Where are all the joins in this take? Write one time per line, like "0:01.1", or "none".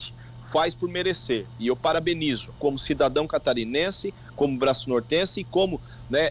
0:02.6